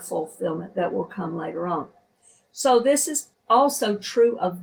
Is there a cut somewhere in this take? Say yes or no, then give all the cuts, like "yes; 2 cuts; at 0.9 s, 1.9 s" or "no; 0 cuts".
no; 0 cuts